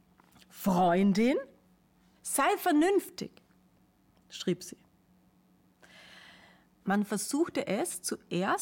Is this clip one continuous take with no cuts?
no; 2 cuts; at 2.1 s, 6.8 s

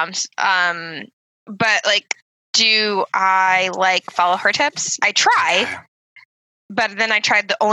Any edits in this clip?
yes; 1 cut; at 5.0 s

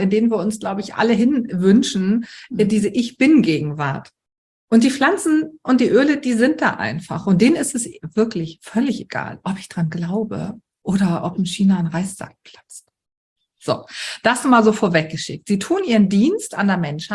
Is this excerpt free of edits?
yes; 0 cuts

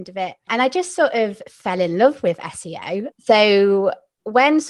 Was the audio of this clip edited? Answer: yes; 1 cut; at 3.1 s

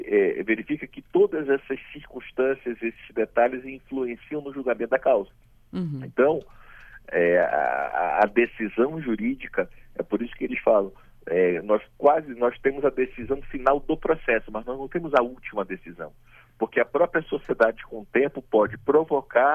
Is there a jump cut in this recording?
no; 0 cuts

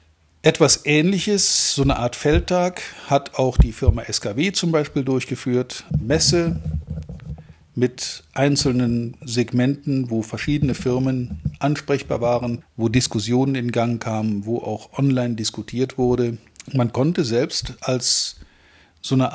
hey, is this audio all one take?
no; 3 cuts; at 5.9 s, 12.6 s, 16.7 s

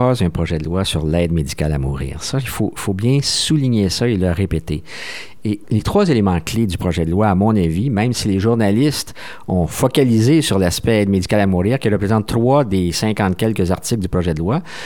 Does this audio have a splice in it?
no; 0 cuts

